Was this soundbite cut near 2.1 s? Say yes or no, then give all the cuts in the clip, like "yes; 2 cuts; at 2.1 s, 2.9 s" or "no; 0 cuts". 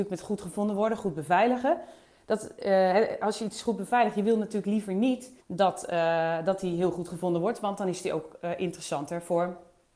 no; 1 cut; at 5.4 s